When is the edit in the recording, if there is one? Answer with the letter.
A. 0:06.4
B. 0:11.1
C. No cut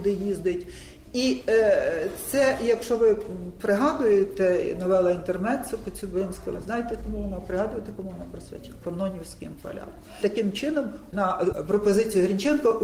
C